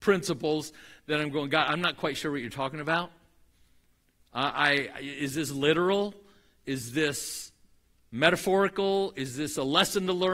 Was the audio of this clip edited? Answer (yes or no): no